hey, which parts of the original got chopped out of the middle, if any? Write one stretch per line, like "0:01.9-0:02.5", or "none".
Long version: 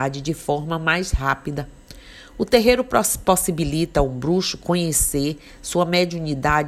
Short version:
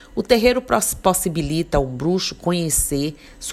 none